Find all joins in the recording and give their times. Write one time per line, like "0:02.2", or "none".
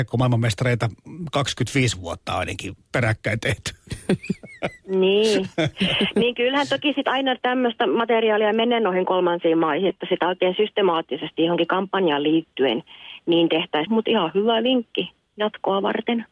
0:09.9
0:13.9

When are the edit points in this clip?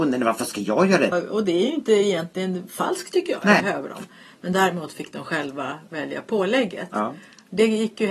0:01.1
0:03.6

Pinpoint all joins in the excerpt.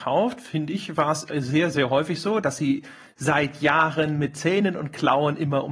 0:02.4

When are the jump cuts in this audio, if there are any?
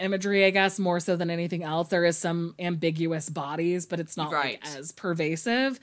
none

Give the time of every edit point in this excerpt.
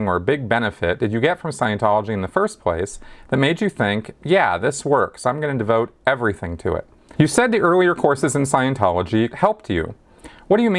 0:07.2
0:09.3

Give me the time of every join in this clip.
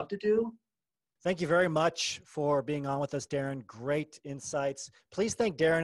0:01.2

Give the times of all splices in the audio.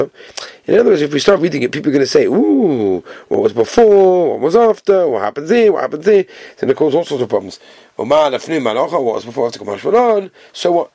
none

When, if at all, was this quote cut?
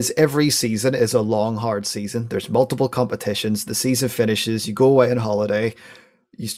none

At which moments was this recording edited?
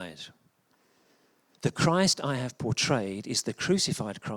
0:01.5

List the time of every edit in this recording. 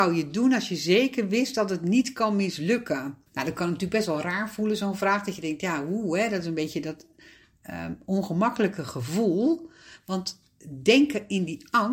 0:03.3

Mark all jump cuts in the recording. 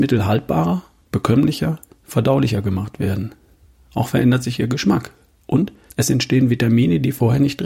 0:05.9

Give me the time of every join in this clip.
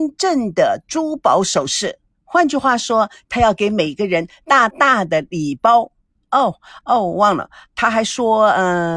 0:04.7

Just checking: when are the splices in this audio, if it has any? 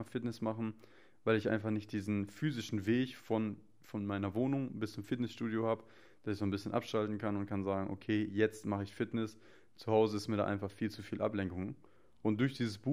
none

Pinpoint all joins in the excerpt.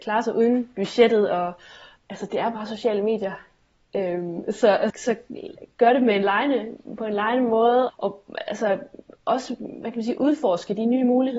0:04.9
0:07.9

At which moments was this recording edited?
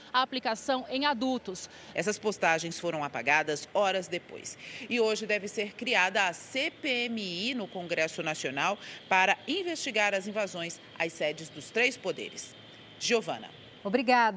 0:01.9

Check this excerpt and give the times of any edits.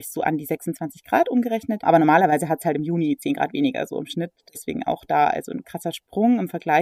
0:05.6

